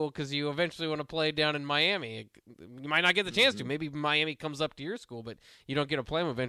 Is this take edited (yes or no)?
no